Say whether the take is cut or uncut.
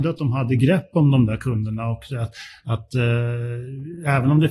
uncut